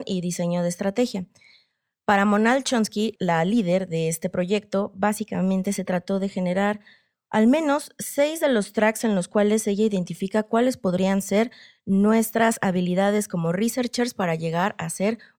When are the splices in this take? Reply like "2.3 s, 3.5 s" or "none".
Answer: 3.2 s